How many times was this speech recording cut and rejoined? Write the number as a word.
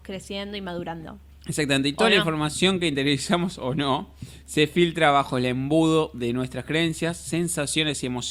zero